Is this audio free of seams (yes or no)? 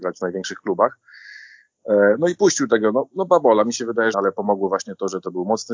no